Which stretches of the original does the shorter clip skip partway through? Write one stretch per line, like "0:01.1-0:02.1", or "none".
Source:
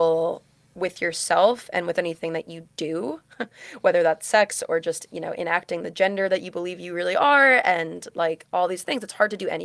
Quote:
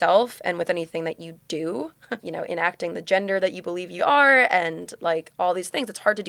0:03.5-0:05.1
0:06.9-0:07.1